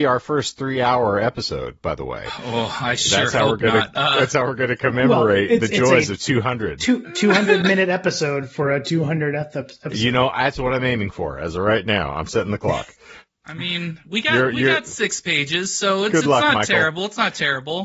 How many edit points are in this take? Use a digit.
0